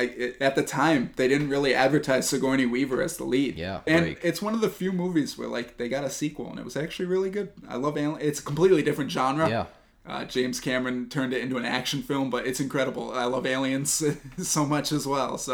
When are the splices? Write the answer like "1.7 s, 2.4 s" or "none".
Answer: 3.9 s